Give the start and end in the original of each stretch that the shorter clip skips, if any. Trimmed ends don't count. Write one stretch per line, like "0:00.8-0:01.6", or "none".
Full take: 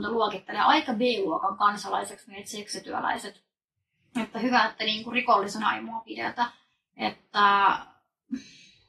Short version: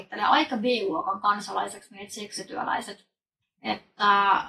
0:03.8-0:06.8